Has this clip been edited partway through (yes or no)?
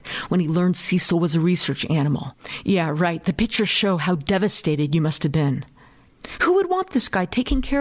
no